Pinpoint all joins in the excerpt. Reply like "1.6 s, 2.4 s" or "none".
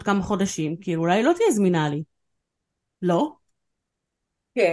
none